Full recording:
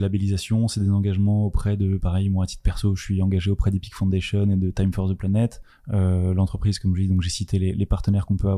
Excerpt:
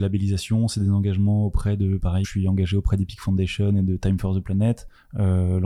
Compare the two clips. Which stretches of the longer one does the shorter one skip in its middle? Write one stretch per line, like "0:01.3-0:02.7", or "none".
0:02.2-0:03.0